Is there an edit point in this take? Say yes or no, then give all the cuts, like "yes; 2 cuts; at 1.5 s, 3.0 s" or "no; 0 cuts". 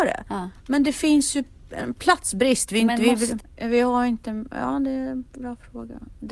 yes; 1 cut; at 3.4 s